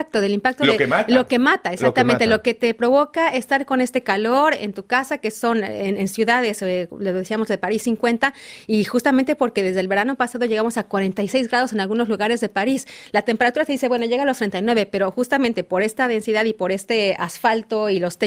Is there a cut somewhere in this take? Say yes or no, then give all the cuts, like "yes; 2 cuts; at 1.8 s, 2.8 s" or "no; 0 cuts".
no; 0 cuts